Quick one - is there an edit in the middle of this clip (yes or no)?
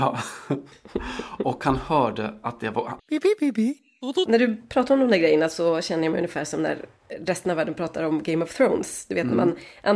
yes